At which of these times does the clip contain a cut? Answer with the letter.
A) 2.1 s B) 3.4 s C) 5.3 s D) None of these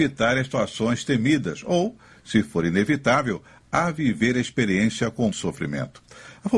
C